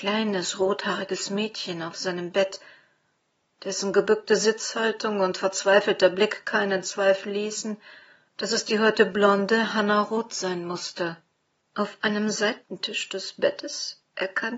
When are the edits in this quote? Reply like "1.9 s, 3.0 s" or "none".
11.7 s